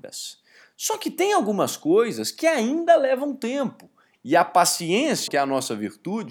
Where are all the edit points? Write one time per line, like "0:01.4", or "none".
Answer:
0:04.2
0:05.3